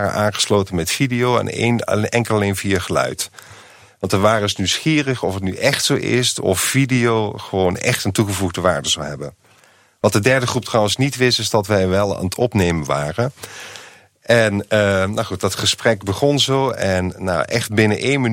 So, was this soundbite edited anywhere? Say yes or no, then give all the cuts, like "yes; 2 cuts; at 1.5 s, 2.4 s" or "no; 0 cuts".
no; 0 cuts